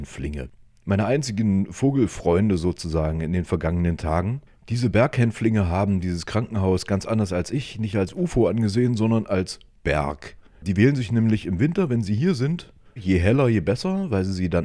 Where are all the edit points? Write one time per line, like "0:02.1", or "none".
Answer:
0:13.0